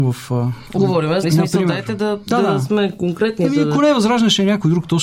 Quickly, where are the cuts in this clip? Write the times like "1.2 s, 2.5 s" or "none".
1.2 s